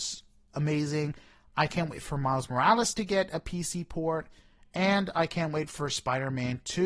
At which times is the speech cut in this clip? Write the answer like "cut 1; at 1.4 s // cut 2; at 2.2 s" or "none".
none